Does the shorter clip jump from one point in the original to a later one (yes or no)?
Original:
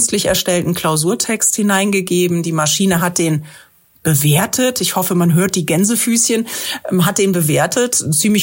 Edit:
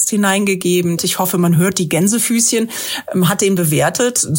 yes